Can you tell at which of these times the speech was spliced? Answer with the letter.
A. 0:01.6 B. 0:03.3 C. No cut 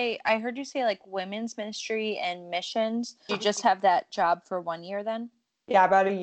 B